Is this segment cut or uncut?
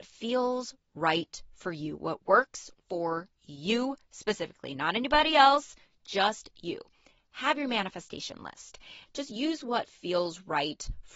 cut